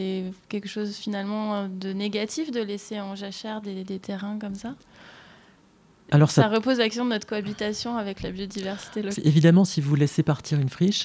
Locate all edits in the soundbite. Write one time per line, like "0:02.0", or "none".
0:09.2